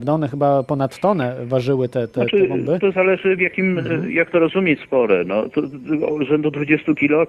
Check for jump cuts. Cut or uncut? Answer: uncut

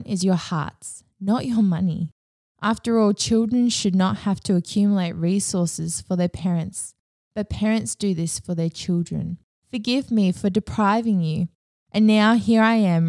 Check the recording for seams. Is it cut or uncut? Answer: cut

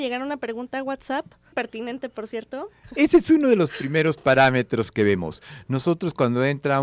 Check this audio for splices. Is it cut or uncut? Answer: cut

